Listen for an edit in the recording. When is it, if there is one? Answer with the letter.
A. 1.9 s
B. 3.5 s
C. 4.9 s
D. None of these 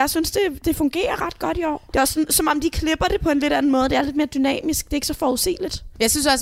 D